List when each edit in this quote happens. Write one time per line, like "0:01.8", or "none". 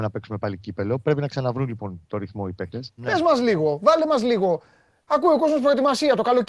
0:03.0